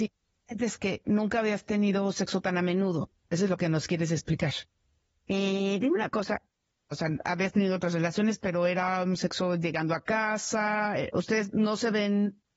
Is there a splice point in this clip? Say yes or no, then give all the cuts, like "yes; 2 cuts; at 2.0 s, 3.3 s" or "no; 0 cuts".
yes; 2 cuts; at 5.1 s, 6.9 s